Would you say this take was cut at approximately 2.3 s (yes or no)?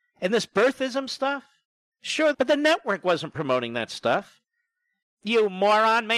yes